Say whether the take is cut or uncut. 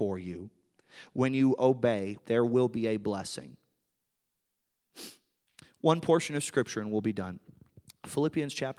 cut